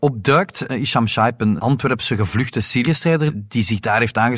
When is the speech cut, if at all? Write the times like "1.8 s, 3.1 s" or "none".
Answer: 1.6 s